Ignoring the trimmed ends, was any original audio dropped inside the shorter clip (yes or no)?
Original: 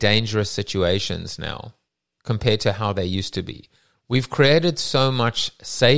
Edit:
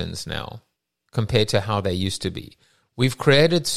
no